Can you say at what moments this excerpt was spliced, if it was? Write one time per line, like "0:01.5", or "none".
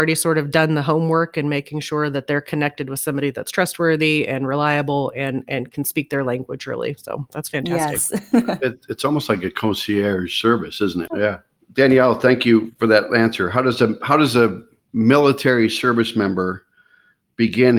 0:11.1